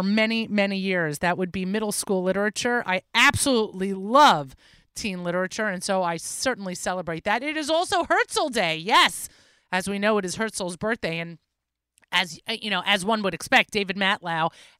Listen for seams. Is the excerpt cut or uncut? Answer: uncut